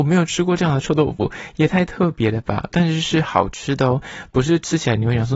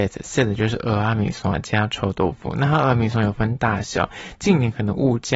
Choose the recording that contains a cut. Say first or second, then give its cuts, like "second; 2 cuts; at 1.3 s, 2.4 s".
first; 1 cut; at 2.7 s